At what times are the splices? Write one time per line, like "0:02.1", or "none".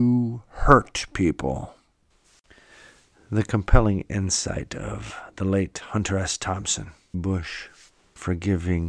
0:07.1